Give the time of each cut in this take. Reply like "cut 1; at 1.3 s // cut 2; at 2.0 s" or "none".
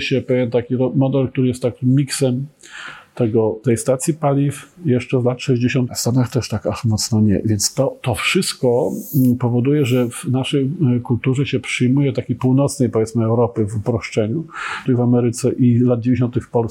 cut 1; at 5.9 s // cut 2; at 14.9 s